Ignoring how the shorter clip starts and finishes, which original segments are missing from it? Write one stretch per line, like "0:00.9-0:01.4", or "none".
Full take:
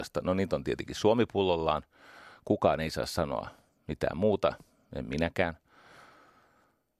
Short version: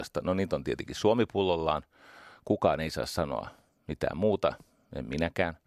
none